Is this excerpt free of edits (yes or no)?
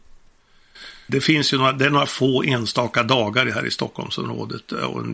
no